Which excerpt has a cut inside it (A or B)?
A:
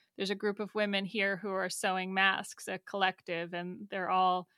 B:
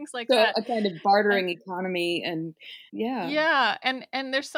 B